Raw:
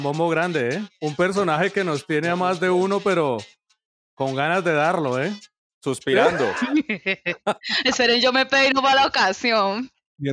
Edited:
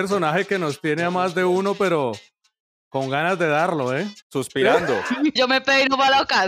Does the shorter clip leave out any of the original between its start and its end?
yes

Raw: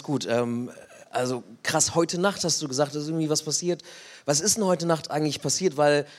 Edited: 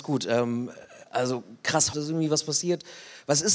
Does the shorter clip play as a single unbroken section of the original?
no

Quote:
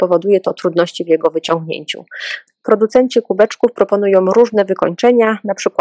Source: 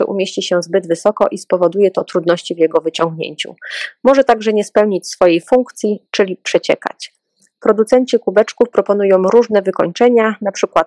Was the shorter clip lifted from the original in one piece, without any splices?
no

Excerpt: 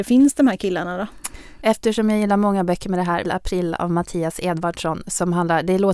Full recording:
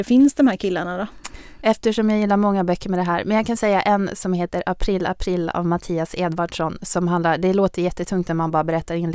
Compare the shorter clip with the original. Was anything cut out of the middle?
yes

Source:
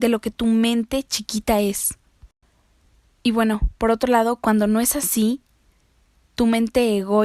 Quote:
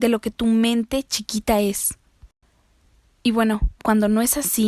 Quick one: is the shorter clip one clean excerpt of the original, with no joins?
no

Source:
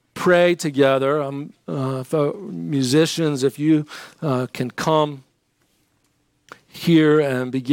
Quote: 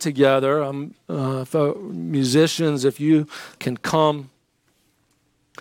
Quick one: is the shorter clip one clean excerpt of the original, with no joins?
no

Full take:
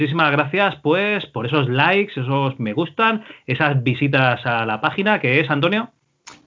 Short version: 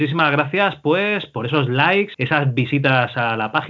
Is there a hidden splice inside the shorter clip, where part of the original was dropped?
yes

